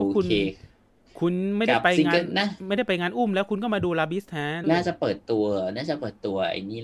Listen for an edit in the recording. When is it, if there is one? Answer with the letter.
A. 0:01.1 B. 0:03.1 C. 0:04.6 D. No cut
C